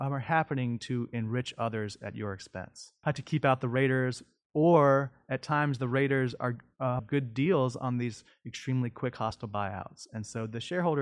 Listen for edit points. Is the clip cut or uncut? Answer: cut